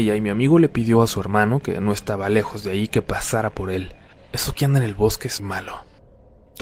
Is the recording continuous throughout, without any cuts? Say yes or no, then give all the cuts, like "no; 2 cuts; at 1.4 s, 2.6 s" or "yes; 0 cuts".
no; 2 cuts; at 4.2 s, 5.4 s